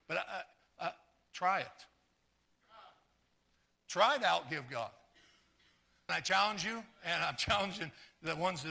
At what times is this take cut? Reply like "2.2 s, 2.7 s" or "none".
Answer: 6.1 s